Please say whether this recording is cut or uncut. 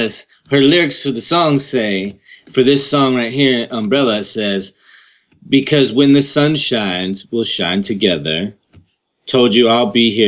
uncut